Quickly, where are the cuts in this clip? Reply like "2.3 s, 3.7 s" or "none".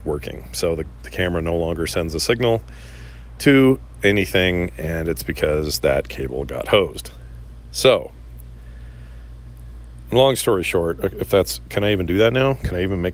none